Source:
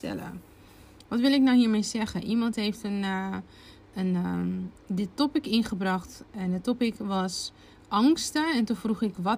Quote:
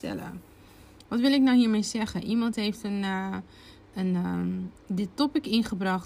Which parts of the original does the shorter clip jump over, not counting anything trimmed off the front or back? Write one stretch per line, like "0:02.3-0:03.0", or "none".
none